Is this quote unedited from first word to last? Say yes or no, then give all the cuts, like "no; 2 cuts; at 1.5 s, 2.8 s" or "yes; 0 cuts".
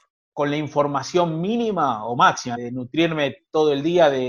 no; 1 cut; at 2.6 s